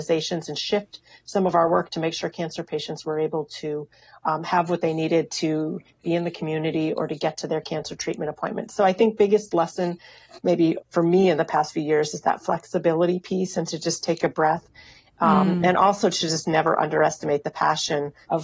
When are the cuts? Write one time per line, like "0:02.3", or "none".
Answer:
none